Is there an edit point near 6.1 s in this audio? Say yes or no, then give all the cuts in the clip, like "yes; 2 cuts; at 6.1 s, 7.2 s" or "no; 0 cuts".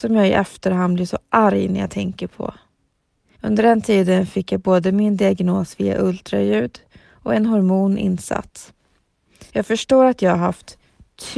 no; 2 cuts; at 3.3 s, 9.5 s